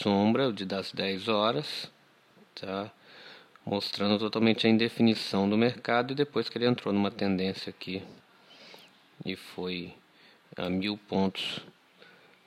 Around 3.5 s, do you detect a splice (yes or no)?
no